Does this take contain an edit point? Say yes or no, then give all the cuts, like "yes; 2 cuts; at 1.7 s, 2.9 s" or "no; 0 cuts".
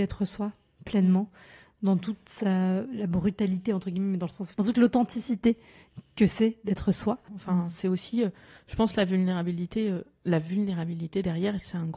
yes; 2 cuts; at 4.5 s, 7.3 s